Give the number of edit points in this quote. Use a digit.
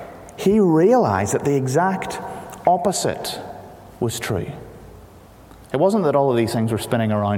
0